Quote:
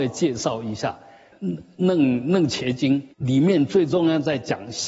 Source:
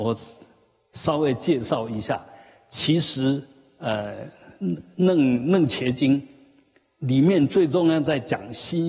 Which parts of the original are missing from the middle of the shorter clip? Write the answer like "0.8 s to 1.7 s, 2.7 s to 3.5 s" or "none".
2.6 s to 4.5 s, 6.3 s to 6.9 s